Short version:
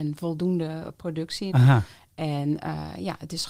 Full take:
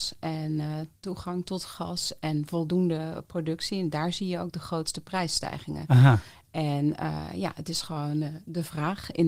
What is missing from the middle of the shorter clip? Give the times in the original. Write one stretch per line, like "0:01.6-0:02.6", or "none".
0:03.8-0:05.9